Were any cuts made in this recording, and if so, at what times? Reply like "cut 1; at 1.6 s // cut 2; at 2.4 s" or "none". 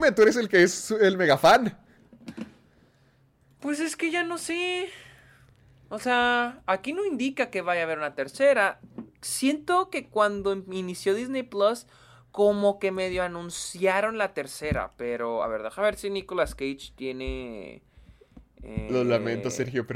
none